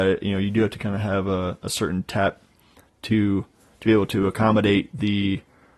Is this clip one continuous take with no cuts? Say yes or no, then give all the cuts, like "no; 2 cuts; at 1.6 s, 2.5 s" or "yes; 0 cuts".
yes; 0 cuts